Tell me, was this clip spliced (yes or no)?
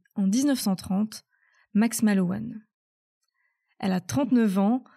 no